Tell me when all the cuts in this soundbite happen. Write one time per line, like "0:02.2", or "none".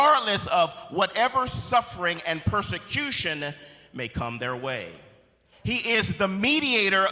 0:05.5